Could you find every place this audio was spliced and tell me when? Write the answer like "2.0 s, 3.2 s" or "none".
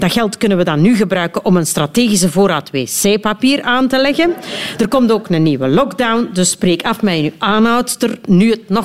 none